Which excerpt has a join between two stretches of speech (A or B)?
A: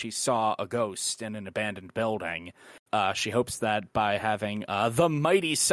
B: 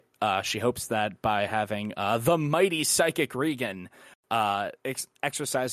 A